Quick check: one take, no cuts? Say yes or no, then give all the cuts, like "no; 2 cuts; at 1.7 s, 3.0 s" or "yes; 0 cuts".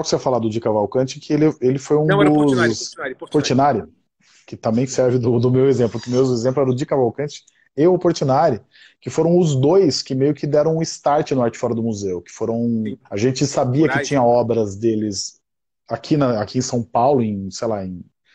no; 1 cut; at 13.0 s